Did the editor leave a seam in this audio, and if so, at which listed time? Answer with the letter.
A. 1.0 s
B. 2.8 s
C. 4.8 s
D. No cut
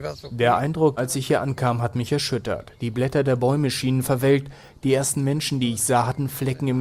A